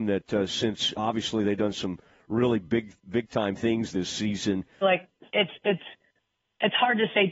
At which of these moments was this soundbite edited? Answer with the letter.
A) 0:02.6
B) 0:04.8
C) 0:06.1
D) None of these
B